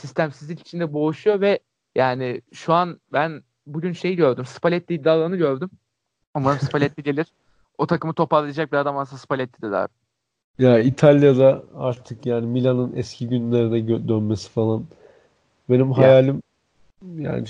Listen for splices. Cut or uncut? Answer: uncut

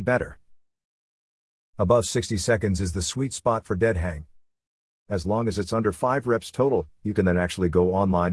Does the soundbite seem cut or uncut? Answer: cut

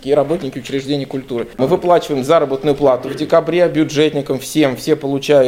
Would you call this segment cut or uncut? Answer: uncut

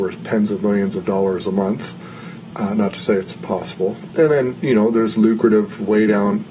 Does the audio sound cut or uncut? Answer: cut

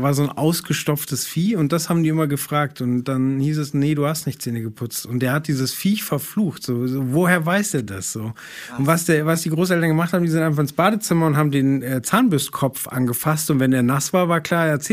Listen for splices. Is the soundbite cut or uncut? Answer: uncut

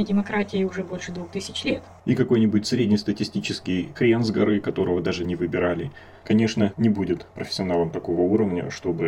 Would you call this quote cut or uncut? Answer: cut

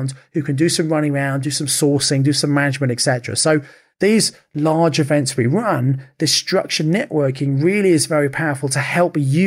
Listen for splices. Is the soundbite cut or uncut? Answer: uncut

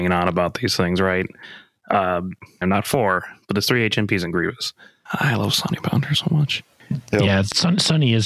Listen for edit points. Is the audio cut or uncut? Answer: cut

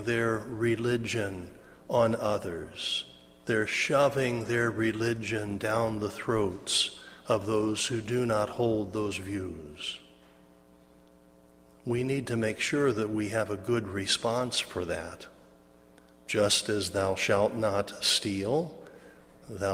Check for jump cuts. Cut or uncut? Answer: cut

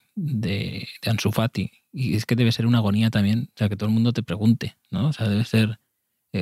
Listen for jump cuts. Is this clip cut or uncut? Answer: uncut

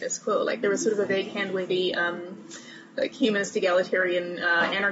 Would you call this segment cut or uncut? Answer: uncut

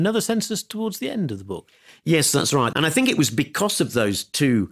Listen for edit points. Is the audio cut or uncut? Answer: cut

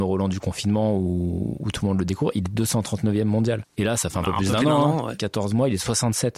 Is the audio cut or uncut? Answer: uncut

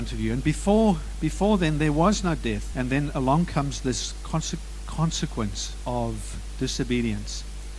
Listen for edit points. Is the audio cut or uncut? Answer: cut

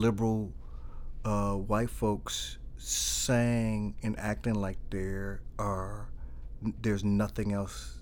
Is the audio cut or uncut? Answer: uncut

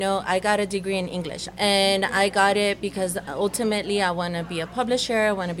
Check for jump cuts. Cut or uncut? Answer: cut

